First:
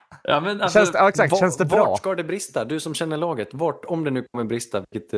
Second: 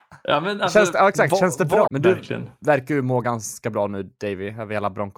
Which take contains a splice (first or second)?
second